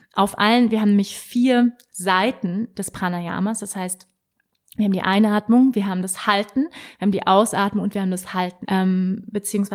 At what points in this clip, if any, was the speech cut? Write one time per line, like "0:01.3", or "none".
0:08.6